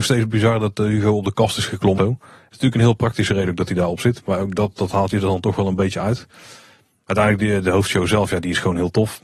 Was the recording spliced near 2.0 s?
yes; 1 cut; at 2.0 s

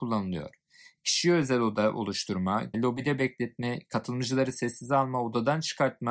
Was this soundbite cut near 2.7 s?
yes; 1 cut; at 2.7 s

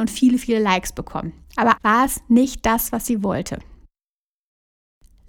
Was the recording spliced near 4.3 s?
no; 1 cut; at 1.8 s

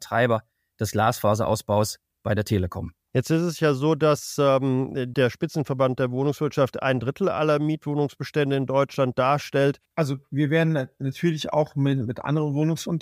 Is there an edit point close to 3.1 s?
no; 2 cuts; at 5.1 s, 9.9 s

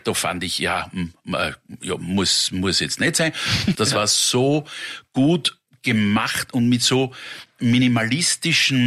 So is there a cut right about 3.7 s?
yes; 1 cut; at 3.7 s

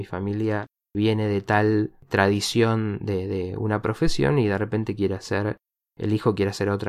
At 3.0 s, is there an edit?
no; 0 cuts

